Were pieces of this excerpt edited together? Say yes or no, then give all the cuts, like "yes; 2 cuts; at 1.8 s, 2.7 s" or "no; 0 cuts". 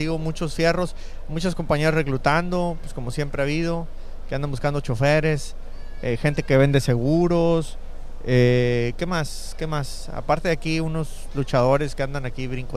no; 0 cuts